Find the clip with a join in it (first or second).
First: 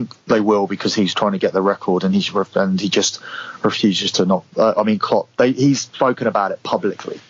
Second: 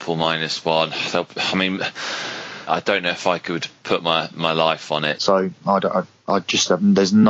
second